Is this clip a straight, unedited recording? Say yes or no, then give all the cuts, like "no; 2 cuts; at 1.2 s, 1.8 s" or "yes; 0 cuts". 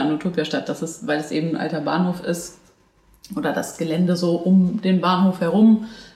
yes; 0 cuts